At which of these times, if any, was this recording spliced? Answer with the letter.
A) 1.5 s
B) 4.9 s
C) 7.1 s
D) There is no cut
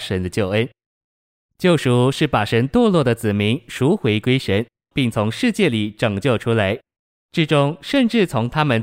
B